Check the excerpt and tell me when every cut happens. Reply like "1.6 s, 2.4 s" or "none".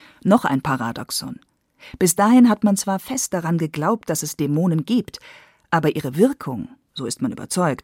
none